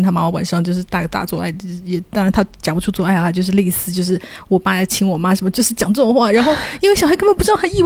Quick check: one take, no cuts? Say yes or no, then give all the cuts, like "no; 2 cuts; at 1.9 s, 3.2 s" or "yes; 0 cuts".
yes; 0 cuts